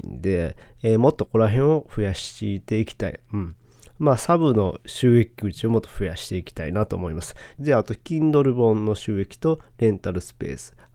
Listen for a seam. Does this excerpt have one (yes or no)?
yes